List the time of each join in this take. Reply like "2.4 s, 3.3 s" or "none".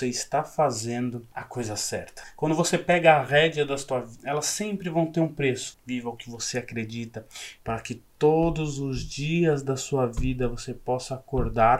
4.2 s, 5.7 s, 7.6 s